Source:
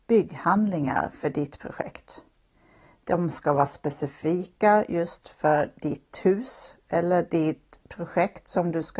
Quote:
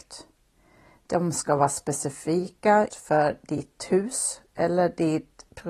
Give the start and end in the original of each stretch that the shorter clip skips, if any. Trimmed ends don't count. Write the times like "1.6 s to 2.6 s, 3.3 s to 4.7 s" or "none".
4.9 s to 5.2 s